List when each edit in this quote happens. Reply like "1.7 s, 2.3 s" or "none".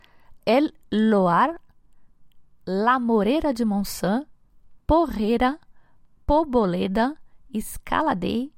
none